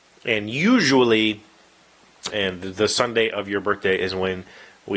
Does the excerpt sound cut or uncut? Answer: cut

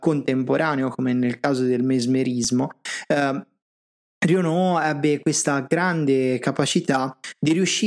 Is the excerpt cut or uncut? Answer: uncut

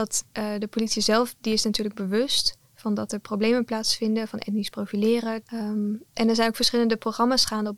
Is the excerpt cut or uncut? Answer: cut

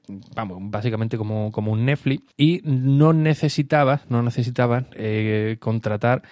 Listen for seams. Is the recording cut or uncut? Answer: cut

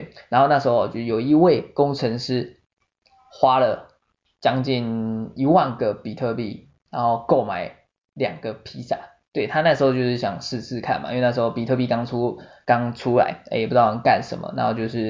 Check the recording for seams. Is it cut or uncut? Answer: uncut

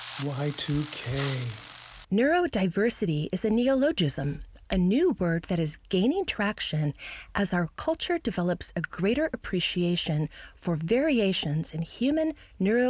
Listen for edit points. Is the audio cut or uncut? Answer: cut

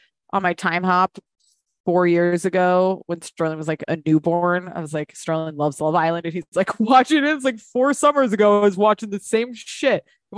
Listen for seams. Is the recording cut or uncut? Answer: uncut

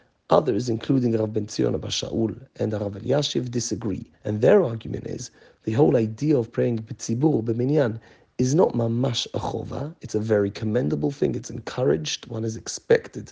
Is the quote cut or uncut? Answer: cut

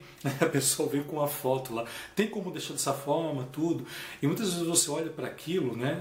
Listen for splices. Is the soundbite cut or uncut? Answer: uncut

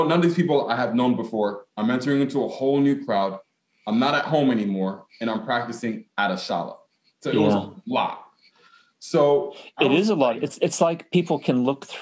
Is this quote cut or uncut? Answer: uncut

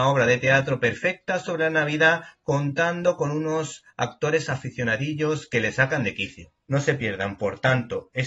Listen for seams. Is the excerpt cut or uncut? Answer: cut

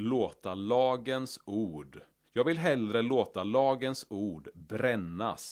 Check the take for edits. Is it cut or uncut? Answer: cut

